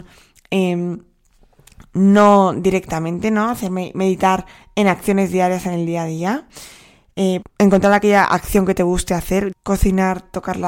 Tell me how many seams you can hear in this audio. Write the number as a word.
two